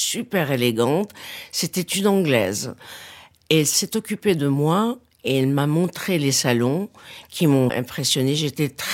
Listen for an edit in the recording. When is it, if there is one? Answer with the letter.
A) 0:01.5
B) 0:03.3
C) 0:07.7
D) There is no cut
C